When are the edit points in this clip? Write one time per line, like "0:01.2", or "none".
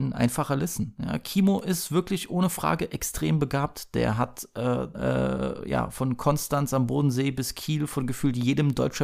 0:04.9